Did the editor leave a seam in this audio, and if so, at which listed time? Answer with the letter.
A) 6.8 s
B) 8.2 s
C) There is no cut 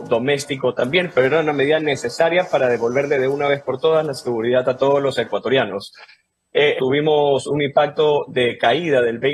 A